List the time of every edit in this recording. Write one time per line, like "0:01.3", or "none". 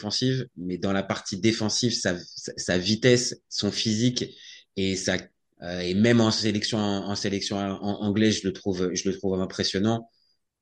0:05.5